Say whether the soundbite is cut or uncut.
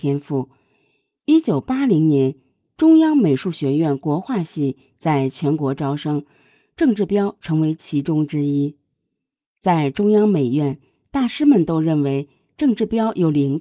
uncut